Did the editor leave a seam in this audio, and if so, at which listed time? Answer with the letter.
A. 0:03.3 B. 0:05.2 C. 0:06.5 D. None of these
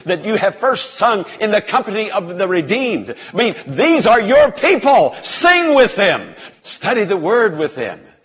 C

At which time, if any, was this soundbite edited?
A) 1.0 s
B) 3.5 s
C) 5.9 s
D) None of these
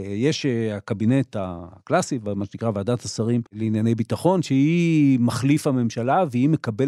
B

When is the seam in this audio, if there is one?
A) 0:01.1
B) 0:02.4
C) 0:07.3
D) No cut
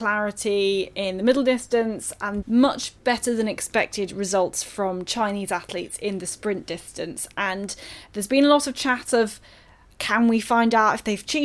B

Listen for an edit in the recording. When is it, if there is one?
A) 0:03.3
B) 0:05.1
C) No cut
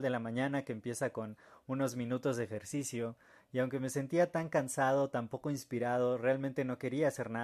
C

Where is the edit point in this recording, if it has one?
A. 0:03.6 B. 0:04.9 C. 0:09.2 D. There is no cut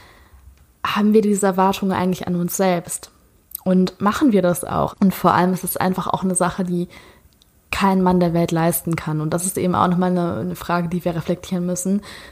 B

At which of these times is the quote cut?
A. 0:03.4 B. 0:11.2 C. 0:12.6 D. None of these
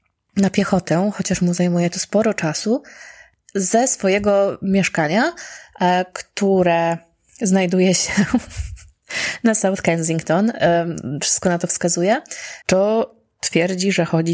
C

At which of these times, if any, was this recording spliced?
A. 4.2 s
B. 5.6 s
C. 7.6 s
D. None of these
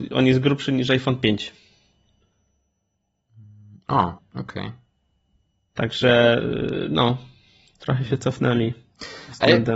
A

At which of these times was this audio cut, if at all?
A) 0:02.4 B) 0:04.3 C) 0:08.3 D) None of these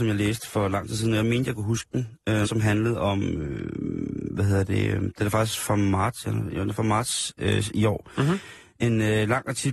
A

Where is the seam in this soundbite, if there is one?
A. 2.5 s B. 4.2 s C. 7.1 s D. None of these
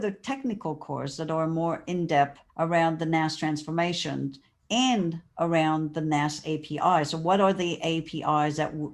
A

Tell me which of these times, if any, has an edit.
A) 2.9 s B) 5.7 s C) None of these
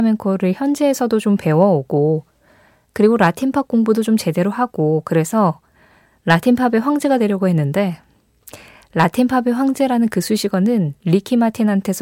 C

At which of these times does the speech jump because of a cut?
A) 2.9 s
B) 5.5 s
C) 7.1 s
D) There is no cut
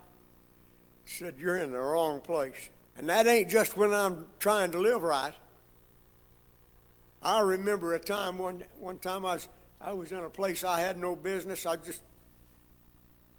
A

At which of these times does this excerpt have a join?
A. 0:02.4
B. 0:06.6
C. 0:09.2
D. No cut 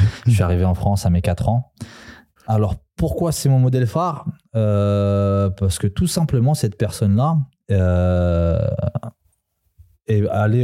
A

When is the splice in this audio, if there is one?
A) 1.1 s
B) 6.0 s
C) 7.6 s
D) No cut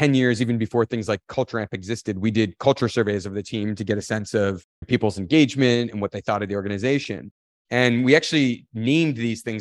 C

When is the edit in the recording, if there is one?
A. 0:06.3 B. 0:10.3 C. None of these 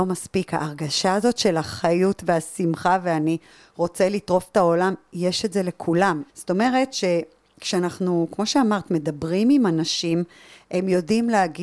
A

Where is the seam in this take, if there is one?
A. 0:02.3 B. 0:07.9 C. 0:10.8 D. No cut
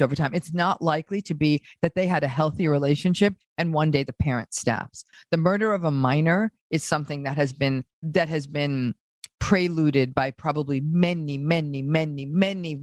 B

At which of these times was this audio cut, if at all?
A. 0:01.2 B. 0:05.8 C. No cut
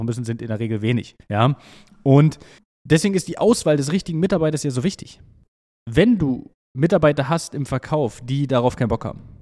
A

